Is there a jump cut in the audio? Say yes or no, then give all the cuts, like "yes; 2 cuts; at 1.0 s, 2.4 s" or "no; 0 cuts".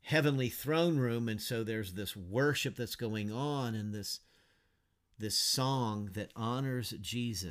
no; 0 cuts